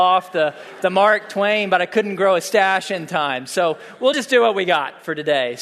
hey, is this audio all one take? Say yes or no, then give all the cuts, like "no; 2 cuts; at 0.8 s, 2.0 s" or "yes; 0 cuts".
yes; 0 cuts